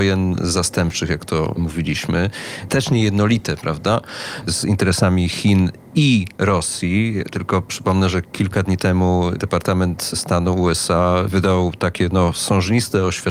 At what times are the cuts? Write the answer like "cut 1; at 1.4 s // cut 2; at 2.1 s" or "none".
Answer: cut 1; at 2.7 s